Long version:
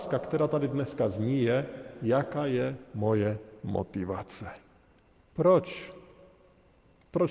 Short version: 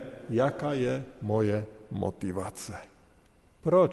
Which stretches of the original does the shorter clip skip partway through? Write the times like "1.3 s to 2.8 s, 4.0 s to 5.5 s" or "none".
none